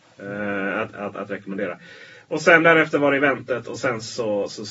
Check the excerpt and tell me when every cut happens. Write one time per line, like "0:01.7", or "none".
none

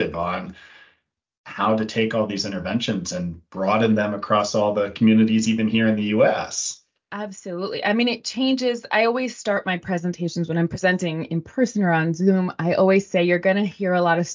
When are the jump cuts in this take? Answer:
none

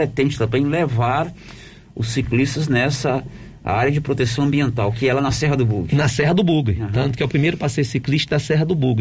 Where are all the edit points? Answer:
none

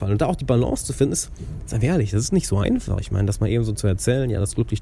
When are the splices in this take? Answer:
none

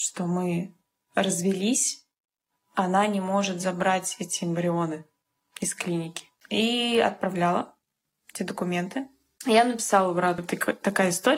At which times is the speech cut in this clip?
0:06.4
0:09.4
0:10.4

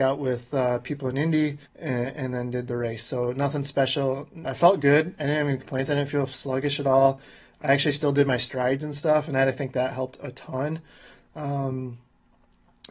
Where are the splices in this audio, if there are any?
0:01.7
0:04.4

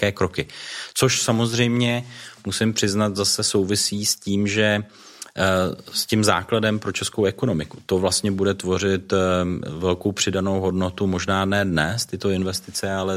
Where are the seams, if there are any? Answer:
none

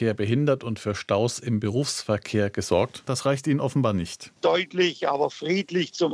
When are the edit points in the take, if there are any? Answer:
0:03.1
0:04.4

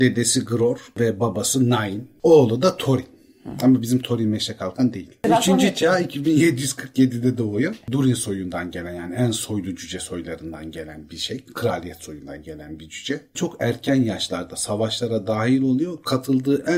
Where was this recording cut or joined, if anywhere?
none

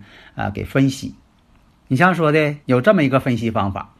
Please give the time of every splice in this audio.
0:02.6

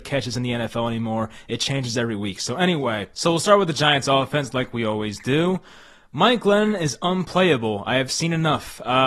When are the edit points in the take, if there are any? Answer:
none

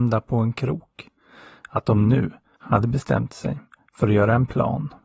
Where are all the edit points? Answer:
none

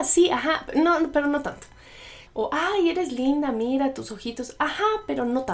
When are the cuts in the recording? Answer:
0:02.3

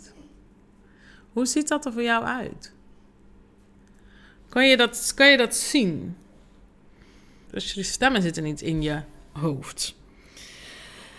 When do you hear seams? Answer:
0:07.5

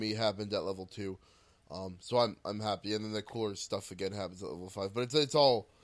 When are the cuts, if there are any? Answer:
none

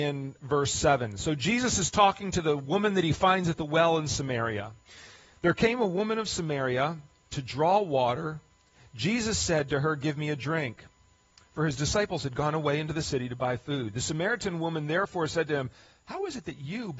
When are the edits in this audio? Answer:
none

